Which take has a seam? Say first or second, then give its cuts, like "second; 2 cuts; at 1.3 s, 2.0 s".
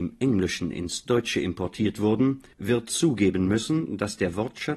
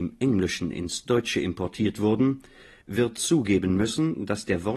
first; 1 cut; at 2.5 s